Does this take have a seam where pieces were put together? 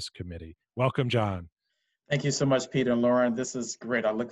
no; 0 cuts

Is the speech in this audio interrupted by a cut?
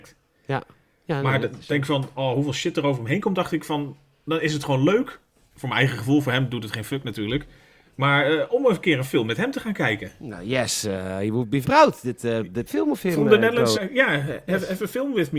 yes; 3 cuts; at 11.6 s, 12.7 s, 13.7 s

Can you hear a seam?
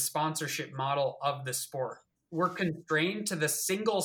yes; 1 cut; at 2.2 s

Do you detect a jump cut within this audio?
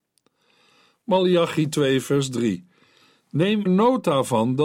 yes; 1 cut; at 3.7 s

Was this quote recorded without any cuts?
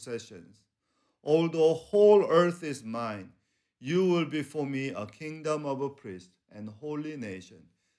yes; 0 cuts

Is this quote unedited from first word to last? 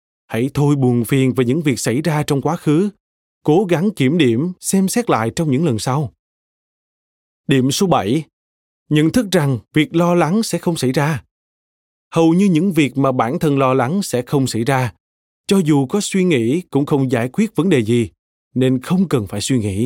yes; 0 cuts

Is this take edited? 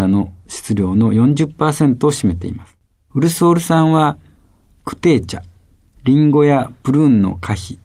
yes; 1 cut; at 3.1 s

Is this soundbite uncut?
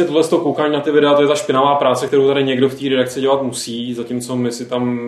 yes; 0 cuts

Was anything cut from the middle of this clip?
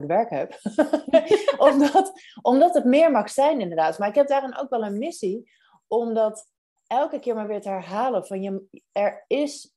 no; 0 cuts

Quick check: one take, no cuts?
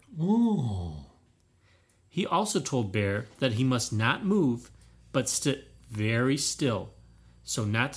yes; 0 cuts

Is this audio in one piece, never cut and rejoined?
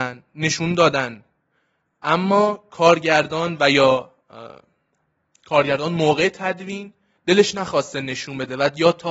yes; 0 cuts

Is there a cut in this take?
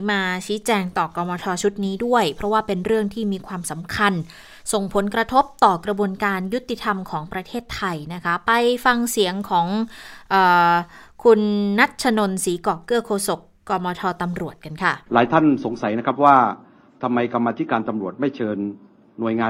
yes; 1 cut; at 15.0 s

